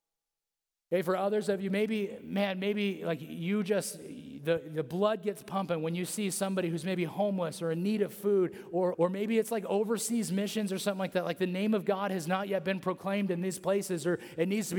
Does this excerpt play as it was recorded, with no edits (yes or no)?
no